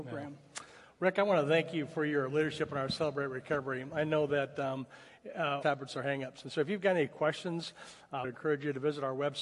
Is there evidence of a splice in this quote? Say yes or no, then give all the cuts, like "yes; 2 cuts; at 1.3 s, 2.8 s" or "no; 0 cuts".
yes; 2 cuts; at 5.6 s, 8.2 s